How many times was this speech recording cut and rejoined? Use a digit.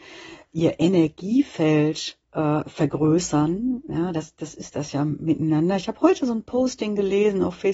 1